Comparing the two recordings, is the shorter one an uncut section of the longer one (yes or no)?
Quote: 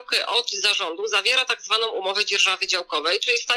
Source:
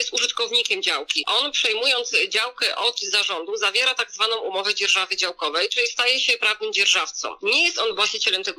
yes